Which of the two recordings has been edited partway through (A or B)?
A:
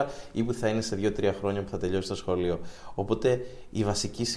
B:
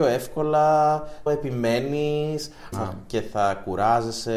B